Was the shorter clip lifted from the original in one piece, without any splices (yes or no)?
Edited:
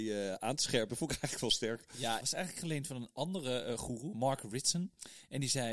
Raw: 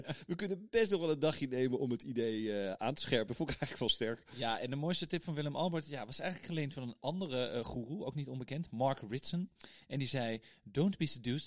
no